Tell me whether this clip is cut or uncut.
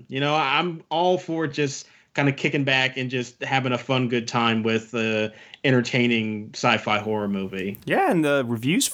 uncut